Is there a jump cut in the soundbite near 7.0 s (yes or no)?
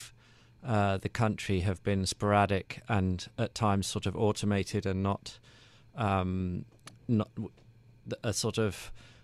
yes